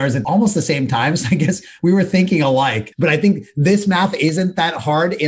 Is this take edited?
yes; 1 cut; at 2.9 s

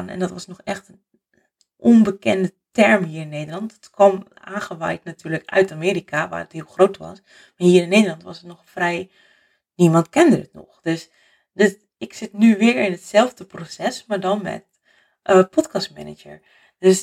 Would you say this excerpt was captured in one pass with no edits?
yes; 0 cuts

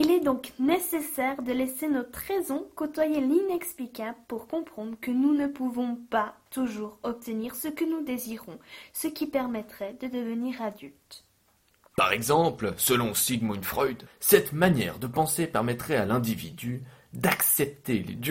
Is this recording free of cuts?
no; 2 cuts; at 11.9 s, 14.1 s

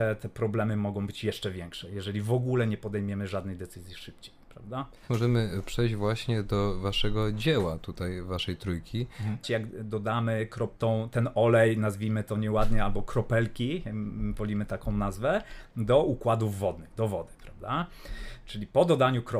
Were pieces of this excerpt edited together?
yes; 1 cut; at 9.4 s

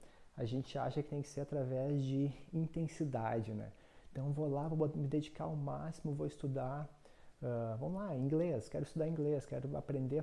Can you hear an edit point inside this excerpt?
no; 0 cuts

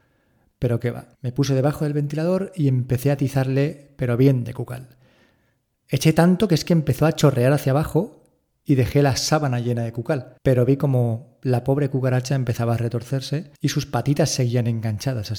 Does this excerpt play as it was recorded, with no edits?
no; 3 cuts; at 1.1 s, 10.4 s, 13.6 s

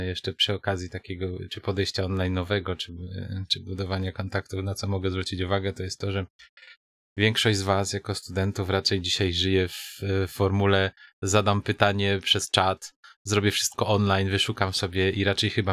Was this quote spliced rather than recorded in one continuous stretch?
no; 0 cuts

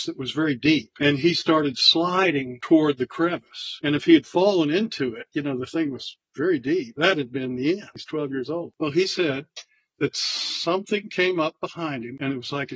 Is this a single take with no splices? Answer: yes; 0 cuts

